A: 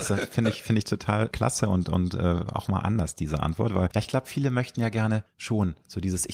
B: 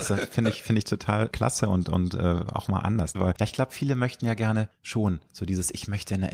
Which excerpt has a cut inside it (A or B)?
B